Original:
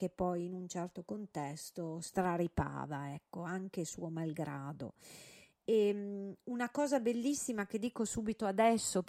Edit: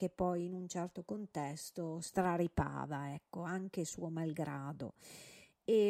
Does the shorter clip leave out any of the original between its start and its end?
no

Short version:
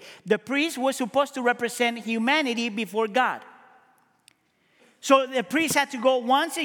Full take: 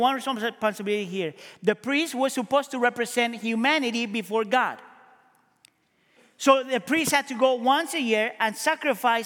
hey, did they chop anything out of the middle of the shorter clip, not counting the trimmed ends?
no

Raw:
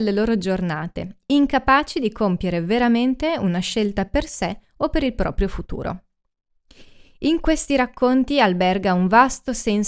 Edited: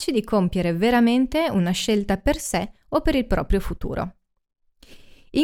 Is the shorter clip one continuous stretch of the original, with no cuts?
yes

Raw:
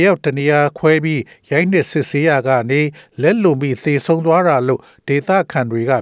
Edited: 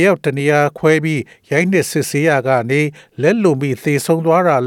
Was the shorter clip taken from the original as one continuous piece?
yes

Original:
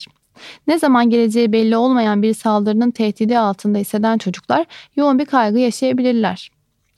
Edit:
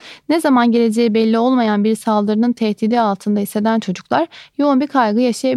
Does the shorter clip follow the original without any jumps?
yes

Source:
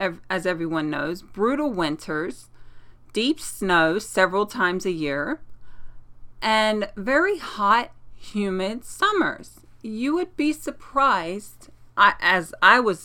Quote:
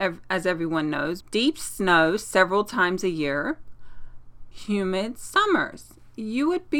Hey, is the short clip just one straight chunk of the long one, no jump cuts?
no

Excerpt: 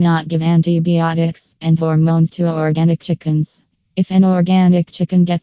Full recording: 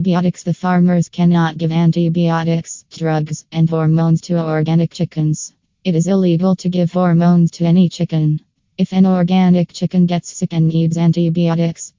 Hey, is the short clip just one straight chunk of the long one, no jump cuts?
no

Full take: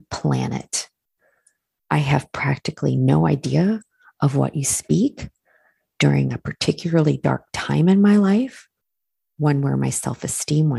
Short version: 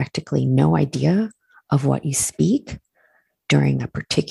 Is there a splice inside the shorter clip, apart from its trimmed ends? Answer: no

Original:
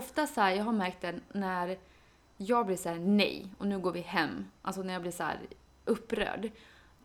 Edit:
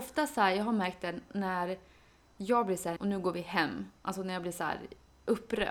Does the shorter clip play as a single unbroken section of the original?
no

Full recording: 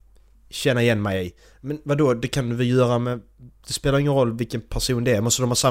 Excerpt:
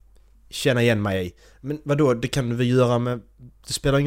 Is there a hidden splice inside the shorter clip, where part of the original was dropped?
no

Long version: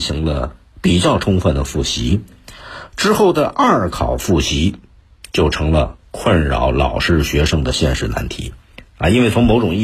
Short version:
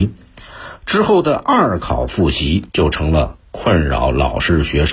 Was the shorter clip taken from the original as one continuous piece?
no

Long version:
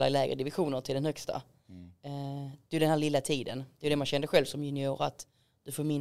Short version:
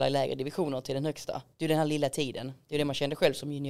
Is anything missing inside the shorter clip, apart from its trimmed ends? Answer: yes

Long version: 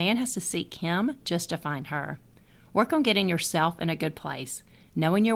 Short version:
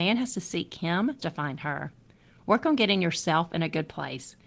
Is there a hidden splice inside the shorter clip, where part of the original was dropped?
yes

